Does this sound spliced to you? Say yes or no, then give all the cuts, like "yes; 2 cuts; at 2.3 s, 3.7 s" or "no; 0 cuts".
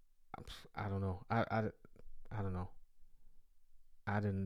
no; 0 cuts